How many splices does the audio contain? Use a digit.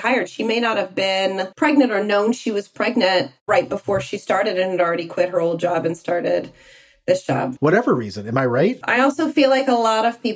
3